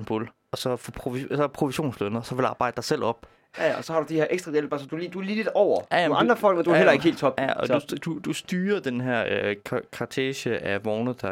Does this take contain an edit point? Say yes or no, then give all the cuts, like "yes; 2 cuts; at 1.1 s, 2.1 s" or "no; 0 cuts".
no; 0 cuts